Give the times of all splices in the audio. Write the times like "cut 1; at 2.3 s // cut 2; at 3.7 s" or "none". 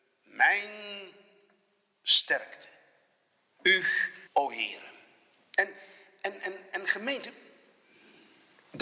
cut 1; at 4.3 s